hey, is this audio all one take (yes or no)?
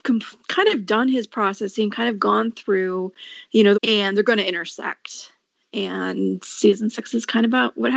no